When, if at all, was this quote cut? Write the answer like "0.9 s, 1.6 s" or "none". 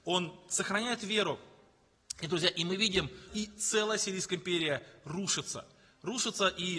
3.3 s